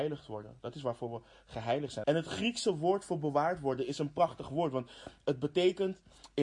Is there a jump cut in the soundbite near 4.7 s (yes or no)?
no